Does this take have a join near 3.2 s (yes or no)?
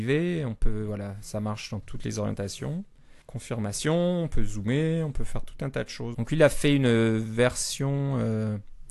yes